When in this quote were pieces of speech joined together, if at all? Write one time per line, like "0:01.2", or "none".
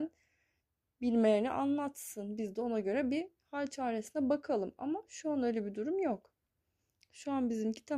none

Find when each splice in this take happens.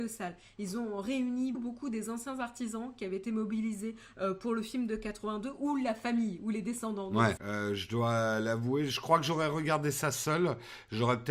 0:01.5
0:07.4

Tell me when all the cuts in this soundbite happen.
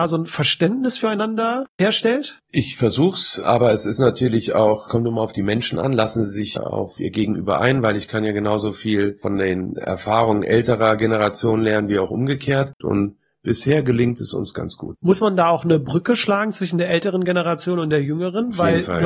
0:12.8

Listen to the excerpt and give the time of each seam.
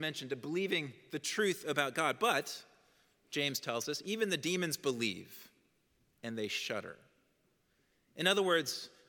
none

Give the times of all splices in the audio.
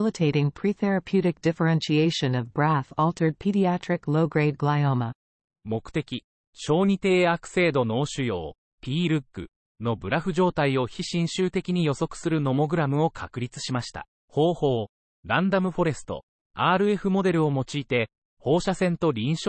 0:14.2

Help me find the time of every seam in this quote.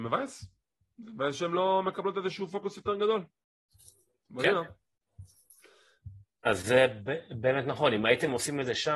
0:06.4

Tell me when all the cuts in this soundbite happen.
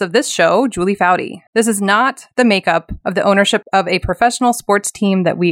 0:01.5
0:03.6

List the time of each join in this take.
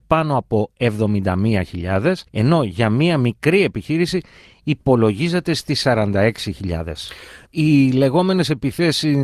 0:02.3
0:07.5

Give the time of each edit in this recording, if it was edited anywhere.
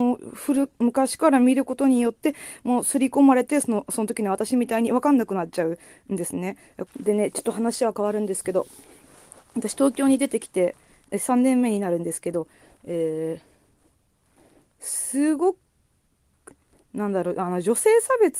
0:06.9

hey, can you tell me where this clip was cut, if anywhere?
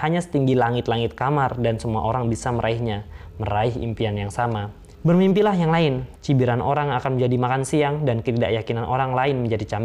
0:04.9
0:06.2

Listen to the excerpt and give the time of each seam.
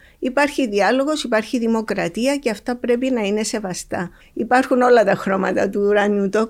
0:04.2

